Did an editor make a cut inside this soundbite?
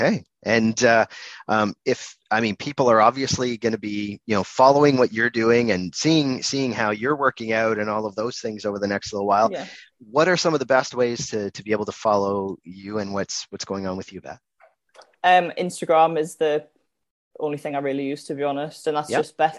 no; 0 cuts

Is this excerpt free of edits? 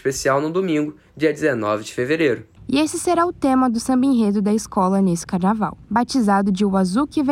no; 2 cuts; at 2.6 s, 5.8 s

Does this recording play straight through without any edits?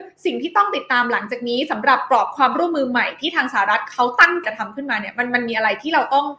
no; 1 cut; at 4.4 s

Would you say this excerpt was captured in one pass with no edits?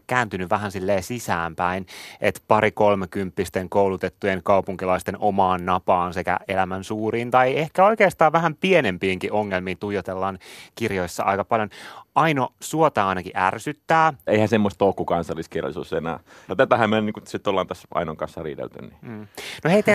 no; 2 cuts; at 14.3 s, 16.5 s

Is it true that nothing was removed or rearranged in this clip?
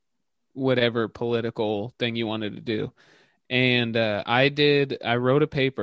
yes; 0 cuts

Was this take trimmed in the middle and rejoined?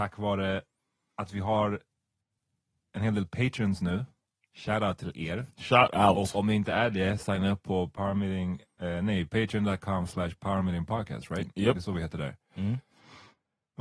no; 0 cuts

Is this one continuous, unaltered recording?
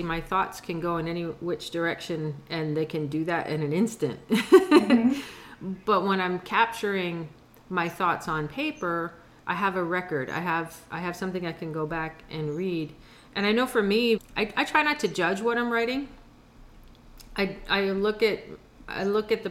no; 1 cut; at 14.2 s

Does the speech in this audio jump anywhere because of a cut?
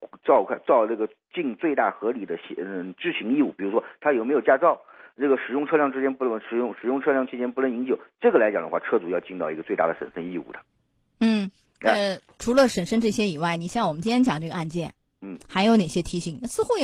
no; 0 cuts

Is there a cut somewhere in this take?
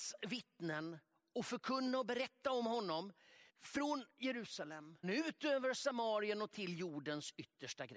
yes; 2 cuts; at 3.5 s, 5.0 s

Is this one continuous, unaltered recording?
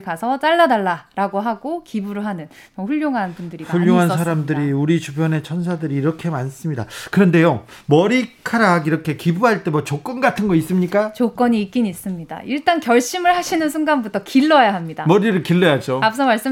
yes; 0 cuts

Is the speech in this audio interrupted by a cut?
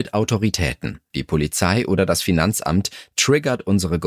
yes; 1 cut; at 1.1 s

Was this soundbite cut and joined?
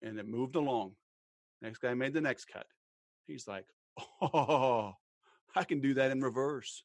no; 0 cuts

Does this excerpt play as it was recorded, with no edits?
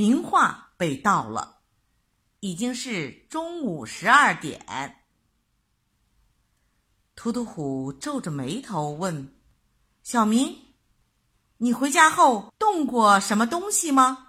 no; 1 cut; at 2.4 s

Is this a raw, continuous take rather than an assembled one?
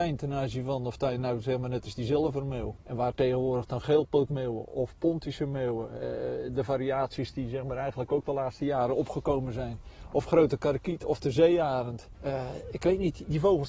yes; 0 cuts

